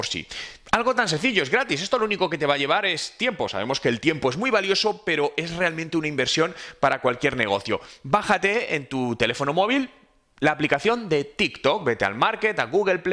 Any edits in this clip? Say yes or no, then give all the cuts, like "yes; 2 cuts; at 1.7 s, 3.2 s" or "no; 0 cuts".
no; 0 cuts